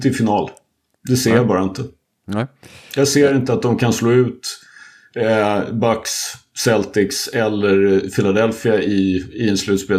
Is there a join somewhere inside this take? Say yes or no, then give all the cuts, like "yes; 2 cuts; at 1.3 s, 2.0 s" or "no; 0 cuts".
no; 0 cuts